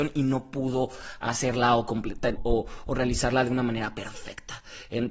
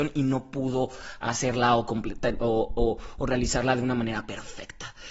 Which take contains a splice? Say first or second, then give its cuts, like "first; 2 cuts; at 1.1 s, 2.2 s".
first; 1 cut; at 2.4 s